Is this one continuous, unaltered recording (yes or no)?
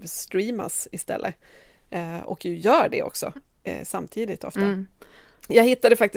yes